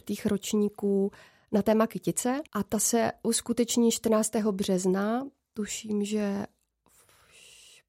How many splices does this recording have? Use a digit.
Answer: 1